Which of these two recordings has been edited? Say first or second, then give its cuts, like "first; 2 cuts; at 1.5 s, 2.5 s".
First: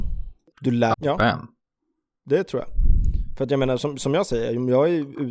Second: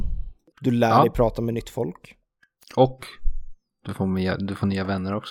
first; 1 cut; at 0.9 s